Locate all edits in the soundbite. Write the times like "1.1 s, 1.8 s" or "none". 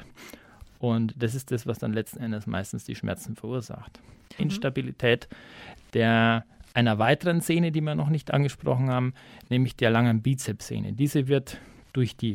4.4 s